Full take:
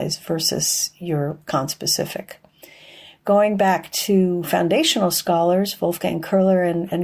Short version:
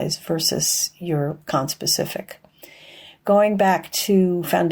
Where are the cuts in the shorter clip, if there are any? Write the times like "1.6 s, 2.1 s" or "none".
none

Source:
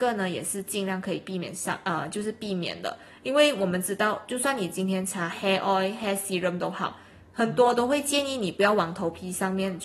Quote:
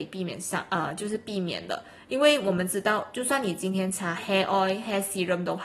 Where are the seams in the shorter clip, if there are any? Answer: none

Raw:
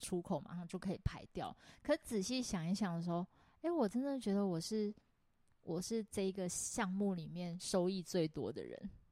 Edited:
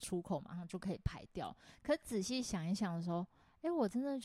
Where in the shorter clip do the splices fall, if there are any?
none

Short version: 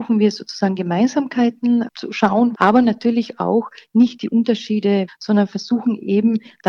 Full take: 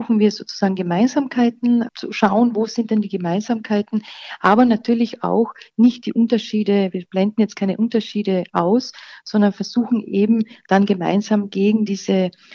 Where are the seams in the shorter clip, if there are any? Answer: 2.5 s, 5.1 s

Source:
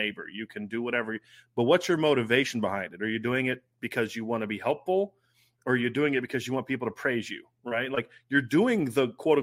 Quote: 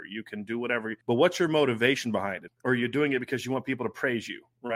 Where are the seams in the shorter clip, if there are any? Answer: 1.0 s, 2.5 s

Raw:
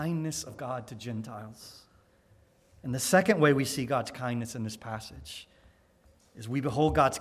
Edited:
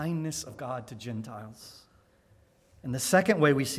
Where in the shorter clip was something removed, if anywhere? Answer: none

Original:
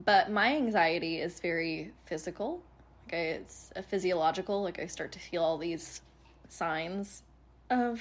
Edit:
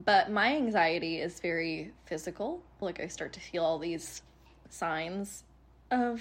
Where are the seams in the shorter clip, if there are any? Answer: 2.8 s

